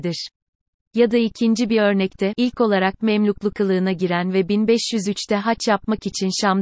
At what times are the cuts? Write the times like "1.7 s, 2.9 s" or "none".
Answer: 2.3 s